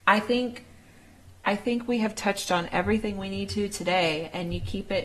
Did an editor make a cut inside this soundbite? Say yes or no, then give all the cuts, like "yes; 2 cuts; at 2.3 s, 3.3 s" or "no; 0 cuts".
no; 0 cuts